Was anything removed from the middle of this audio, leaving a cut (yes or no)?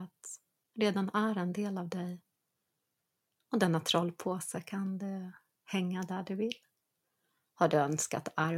no